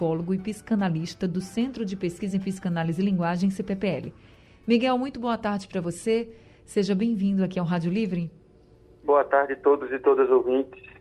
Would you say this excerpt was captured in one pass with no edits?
no; 1 cut; at 9.0 s

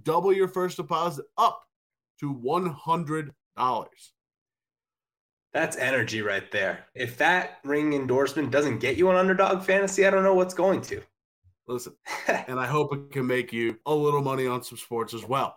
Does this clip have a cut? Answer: yes; 3 cuts; at 7.0 s, 12.0 s, 13.8 s

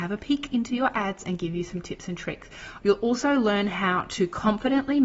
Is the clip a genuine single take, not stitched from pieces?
no; 1 cut; at 2.8 s

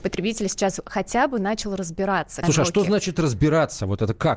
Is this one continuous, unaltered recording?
no; 1 cut; at 2.4 s

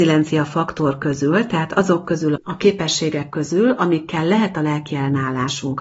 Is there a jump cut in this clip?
yes; 1 cut; at 2.4 s

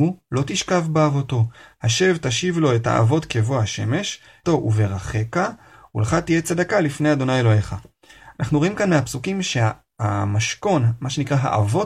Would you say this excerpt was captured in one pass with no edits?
no; 1 cut; at 4.4 s

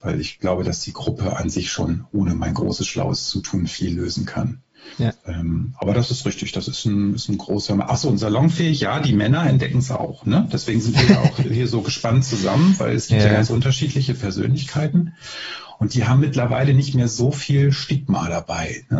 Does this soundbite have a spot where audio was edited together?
no; 0 cuts

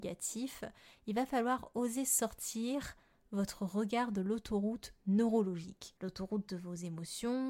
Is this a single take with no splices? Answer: no; 1 cut; at 6.0 s

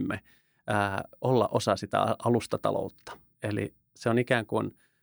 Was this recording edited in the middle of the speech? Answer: yes; 1 cut; at 3.3 s

